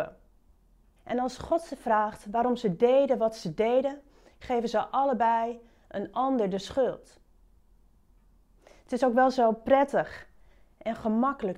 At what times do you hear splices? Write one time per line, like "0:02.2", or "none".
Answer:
0:01.0